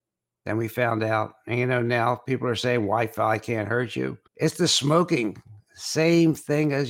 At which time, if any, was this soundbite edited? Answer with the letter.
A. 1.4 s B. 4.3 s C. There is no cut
B